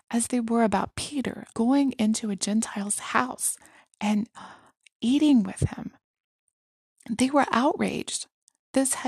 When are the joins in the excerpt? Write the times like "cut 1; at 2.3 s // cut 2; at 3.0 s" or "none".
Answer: cut 1; at 1.5 s